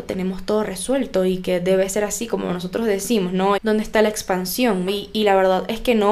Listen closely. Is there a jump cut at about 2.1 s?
no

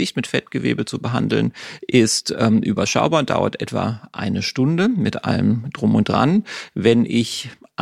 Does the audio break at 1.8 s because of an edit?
no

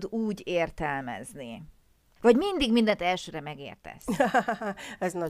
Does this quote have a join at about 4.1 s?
no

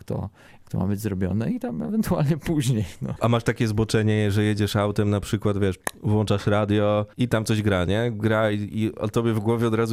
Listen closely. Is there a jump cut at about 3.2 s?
no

